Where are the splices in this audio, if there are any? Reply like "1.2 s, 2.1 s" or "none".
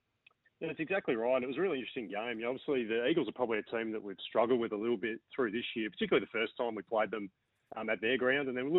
none